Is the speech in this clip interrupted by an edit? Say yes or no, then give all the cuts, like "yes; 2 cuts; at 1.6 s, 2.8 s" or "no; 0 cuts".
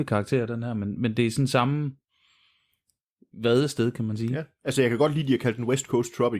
yes; 1 cut; at 0.9 s